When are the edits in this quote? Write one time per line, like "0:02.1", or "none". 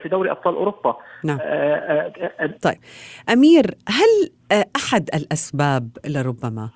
0:02.5